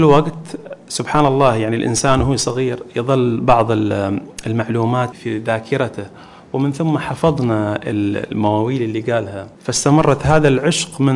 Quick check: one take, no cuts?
no; 2 cuts; at 5.1 s, 9.5 s

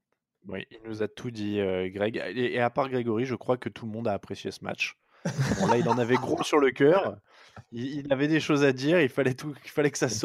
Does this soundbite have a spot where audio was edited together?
no; 0 cuts

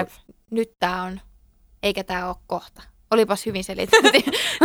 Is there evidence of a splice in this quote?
no; 0 cuts

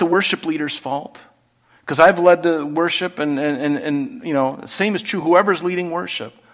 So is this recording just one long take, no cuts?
yes; 0 cuts

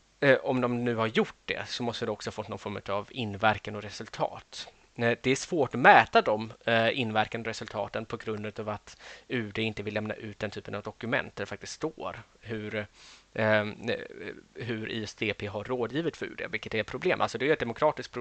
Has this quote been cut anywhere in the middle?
no; 0 cuts

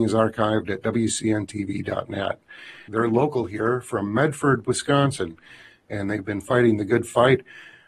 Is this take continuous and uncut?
no; 1 cut; at 2.9 s

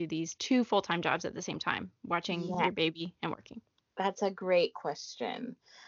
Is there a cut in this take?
no; 0 cuts

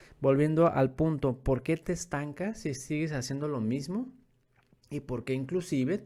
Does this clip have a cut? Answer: no; 0 cuts

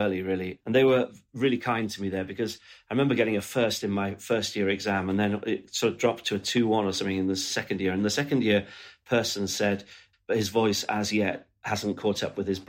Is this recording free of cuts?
no; 1 cut; at 10.1 s

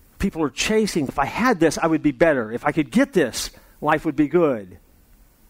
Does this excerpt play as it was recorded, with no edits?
no; 1 cut; at 1.1 s

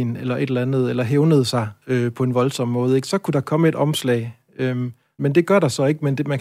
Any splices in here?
yes; 1 cut; at 5.2 s

